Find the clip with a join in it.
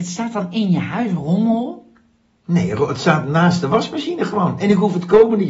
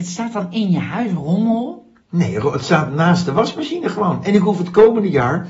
second; 1 cut; at 2.0 s

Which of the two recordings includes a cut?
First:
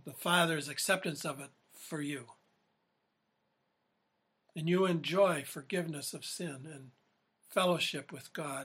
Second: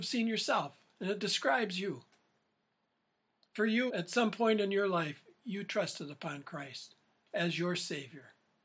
second; 1 cut; at 3.9 s

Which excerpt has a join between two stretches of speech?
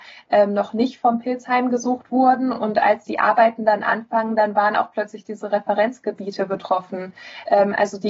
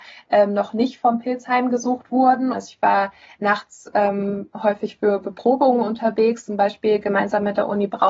second; 1 cut; at 2.5 s

